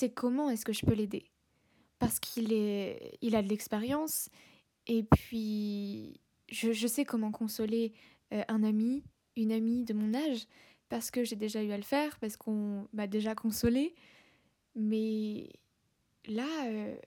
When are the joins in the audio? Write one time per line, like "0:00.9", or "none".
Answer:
none